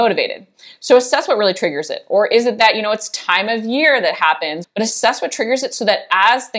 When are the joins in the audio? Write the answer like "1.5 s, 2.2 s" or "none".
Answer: 4.6 s